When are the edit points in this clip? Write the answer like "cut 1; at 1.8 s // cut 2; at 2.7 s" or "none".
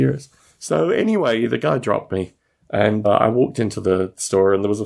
cut 1; at 3.0 s